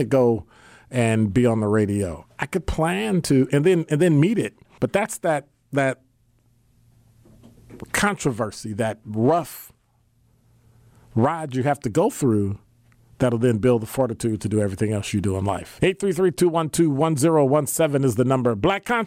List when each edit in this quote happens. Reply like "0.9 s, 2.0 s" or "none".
4.8 s, 15.8 s